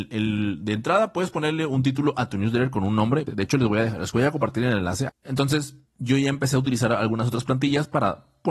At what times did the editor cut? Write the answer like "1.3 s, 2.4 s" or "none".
3.3 s, 5.1 s